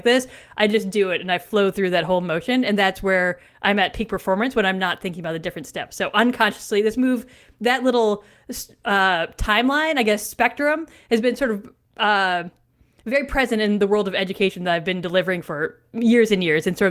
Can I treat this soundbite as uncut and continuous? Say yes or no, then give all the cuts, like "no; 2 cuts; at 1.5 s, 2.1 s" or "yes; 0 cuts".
yes; 0 cuts